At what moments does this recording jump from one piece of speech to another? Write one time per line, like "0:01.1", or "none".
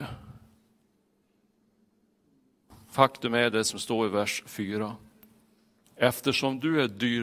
none